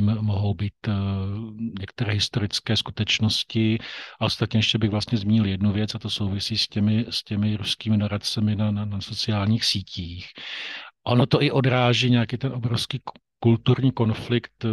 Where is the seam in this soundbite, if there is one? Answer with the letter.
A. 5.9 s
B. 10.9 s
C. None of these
C